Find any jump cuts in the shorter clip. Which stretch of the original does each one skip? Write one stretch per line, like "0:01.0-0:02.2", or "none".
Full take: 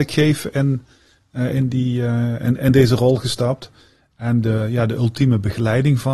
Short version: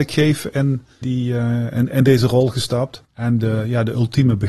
0:01.0-0:01.7
0:03.7-0:04.1

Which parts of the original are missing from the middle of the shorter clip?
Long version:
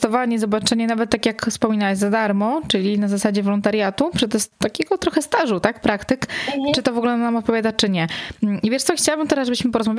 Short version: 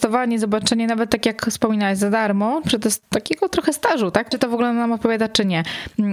0:02.6-0:04.1
0:05.8-0:06.8

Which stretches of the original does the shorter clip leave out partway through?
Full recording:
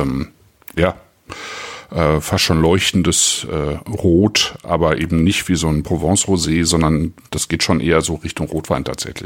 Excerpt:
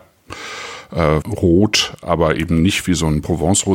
0:02.2-0:03.8

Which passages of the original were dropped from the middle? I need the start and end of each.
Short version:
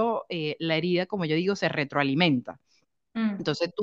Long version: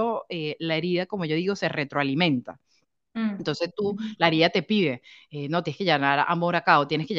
none

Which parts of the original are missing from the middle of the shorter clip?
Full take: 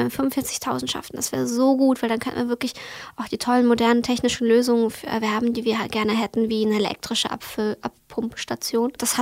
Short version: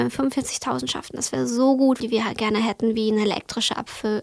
0:02.0-0:05.5

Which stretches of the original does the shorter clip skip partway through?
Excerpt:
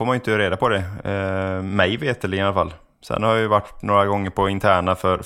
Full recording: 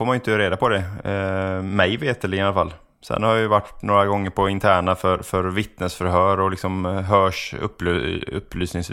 none

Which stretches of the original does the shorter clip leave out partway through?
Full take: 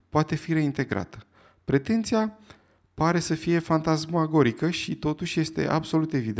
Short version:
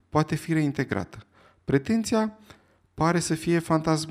none

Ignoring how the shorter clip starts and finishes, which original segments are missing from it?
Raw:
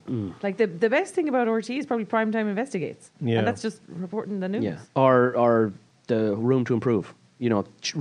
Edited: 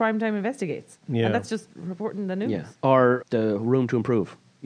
0:05.3-0:06.0

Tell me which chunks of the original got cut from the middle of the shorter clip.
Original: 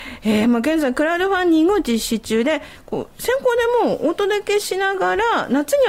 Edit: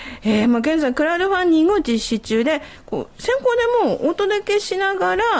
none

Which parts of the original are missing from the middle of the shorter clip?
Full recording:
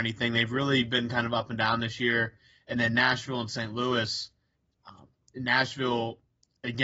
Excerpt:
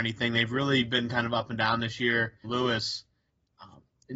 0:02.4-0:03.7

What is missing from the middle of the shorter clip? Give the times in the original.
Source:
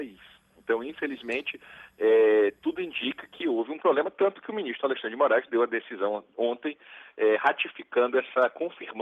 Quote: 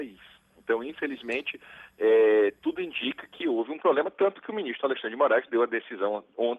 none

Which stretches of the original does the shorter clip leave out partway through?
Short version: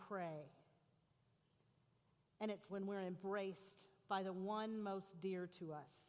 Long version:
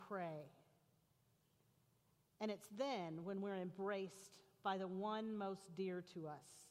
0:02.7-0:03.2

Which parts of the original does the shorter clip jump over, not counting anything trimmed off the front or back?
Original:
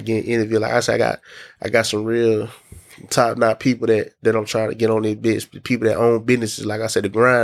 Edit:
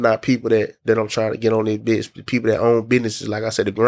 none

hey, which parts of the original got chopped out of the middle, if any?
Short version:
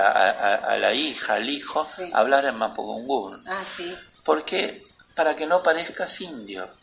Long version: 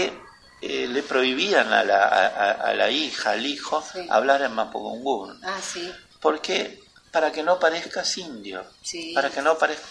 none

